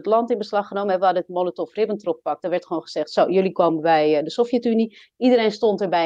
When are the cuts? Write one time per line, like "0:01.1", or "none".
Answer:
none